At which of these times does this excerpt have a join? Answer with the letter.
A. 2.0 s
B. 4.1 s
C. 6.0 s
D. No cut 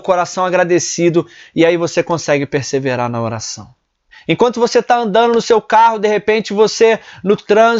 B